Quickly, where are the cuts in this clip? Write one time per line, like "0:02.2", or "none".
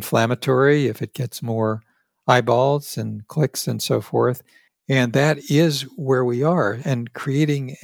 0:04.7